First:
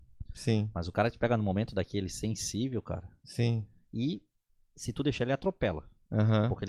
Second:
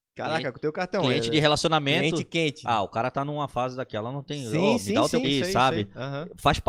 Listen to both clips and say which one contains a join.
second; 1 cut; at 5.2 s

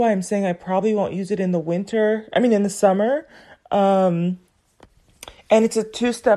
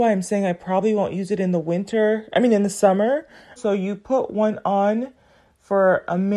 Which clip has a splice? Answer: second; 1 cut; at 3.6 s

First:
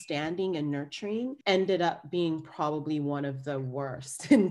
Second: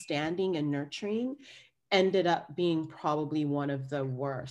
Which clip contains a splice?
first; 1 cut; at 1.4 s

